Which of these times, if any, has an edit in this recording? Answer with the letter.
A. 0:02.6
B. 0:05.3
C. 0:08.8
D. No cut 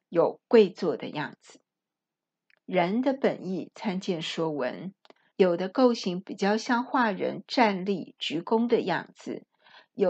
B